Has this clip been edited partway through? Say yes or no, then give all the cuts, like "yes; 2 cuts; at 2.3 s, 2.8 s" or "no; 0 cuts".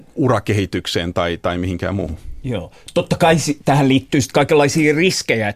no; 0 cuts